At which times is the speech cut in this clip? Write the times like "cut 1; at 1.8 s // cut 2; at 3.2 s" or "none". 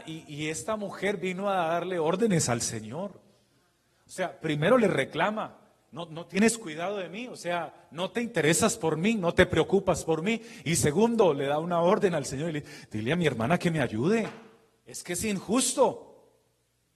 none